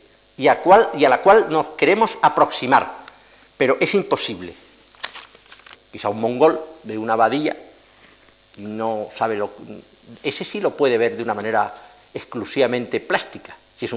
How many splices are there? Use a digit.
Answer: 1